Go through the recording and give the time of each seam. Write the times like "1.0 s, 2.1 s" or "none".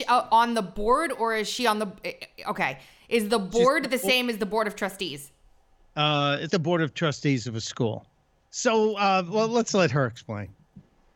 6.5 s, 8.4 s

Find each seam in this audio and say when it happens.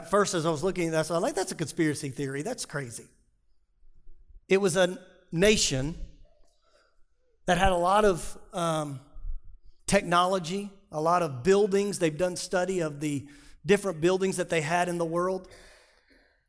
4.4 s, 9.8 s

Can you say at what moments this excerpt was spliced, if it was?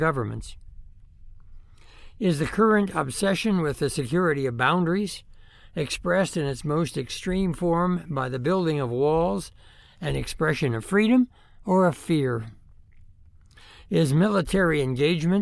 none

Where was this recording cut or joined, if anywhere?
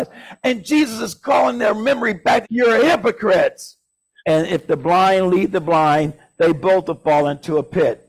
2.4 s, 4.2 s

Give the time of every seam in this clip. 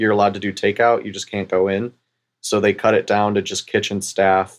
none

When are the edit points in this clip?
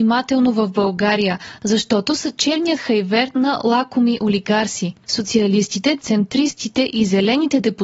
5.0 s, 6.0 s

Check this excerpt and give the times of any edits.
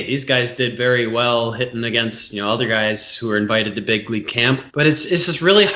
4.7 s

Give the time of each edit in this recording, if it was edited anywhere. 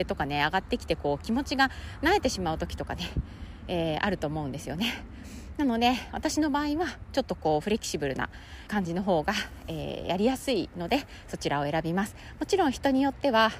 8.7 s

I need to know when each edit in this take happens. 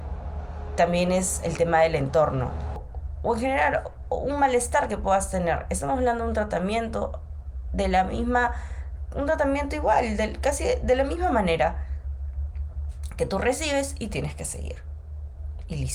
none

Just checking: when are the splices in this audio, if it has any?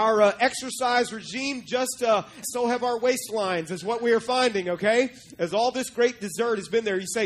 2.4 s

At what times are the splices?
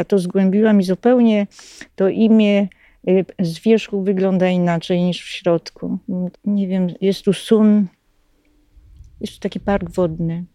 6.3 s

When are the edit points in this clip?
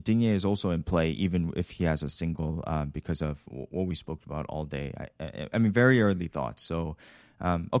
none

